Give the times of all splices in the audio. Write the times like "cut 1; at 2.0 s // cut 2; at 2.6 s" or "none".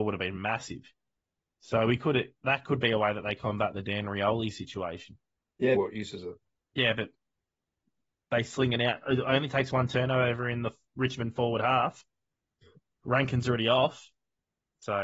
cut 1; at 5.8 s